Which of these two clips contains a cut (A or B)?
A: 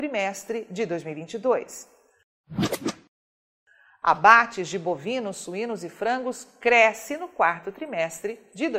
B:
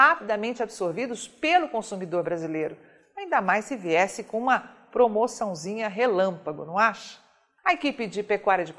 B